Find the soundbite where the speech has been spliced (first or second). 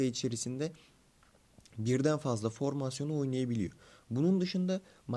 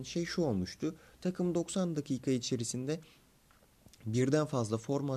first